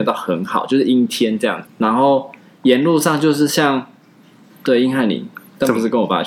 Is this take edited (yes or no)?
yes